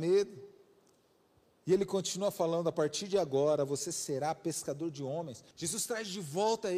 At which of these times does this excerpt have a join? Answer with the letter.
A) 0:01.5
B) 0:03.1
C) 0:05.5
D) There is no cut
C